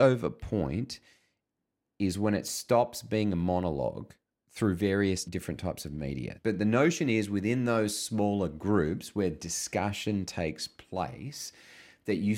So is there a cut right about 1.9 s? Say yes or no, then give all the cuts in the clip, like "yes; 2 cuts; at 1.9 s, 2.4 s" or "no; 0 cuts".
no; 2 cuts; at 5.2 s, 6.4 s